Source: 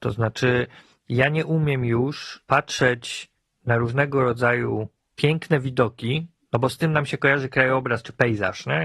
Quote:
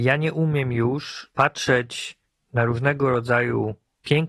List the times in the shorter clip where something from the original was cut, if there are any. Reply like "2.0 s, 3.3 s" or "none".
none